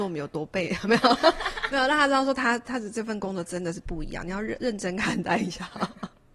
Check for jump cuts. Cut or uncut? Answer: uncut